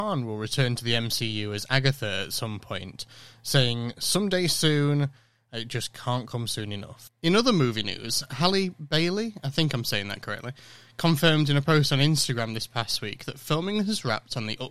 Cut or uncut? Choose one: uncut